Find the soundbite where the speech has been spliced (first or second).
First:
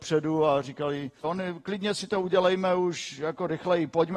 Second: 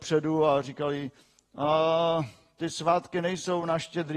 first